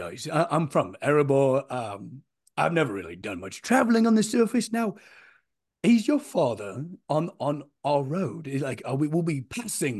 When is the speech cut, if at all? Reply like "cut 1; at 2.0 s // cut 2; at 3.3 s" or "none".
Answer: none